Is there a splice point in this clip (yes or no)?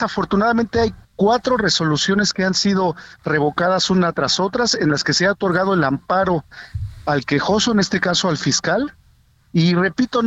yes